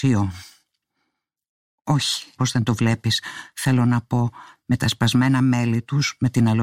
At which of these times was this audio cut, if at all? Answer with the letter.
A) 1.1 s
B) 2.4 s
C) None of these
B